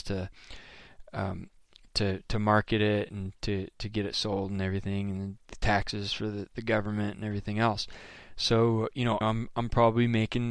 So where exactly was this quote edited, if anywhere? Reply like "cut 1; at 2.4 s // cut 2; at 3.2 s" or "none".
cut 1; at 9.2 s